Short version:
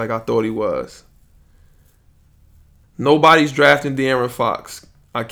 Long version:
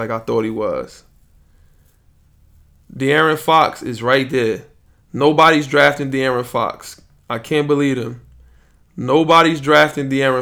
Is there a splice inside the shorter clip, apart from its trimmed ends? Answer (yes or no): yes